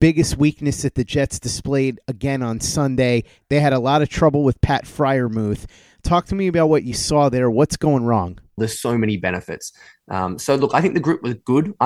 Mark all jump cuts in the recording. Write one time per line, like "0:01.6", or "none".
0:08.6